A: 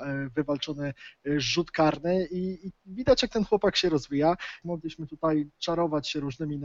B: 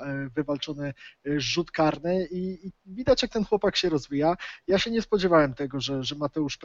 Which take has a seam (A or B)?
A